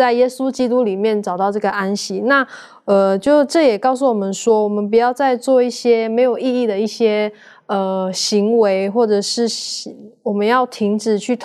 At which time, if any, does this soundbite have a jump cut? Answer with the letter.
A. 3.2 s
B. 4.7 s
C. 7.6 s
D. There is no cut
D